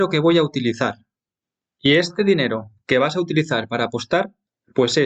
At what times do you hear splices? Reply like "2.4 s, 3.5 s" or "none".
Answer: none